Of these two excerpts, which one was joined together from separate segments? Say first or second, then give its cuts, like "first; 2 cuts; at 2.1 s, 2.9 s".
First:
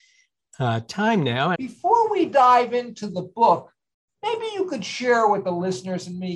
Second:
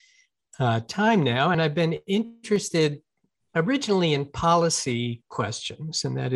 first; 1 cut; at 1.5 s